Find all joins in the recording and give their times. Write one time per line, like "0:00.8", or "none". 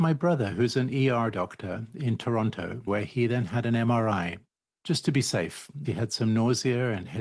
0:02.9
0:05.8